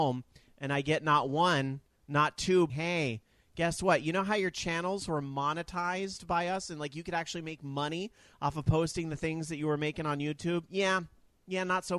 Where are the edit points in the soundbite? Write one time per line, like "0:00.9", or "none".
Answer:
0:02.7